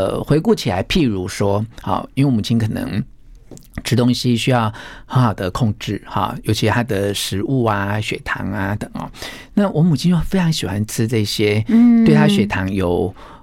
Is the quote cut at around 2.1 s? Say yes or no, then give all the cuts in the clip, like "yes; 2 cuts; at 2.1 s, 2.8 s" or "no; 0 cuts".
no; 1 cut; at 8.8 s